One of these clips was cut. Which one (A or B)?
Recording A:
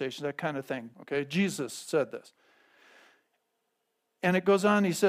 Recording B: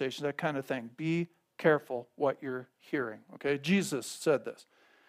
A